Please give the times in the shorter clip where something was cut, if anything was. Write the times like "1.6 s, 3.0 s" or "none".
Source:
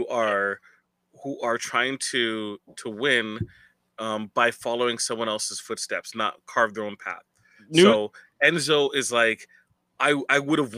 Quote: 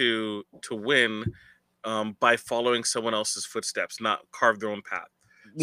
none